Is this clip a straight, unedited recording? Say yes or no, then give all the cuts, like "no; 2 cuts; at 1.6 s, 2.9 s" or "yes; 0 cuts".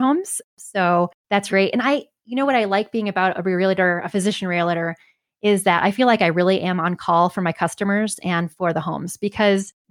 no; 1 cut; at 1.5 s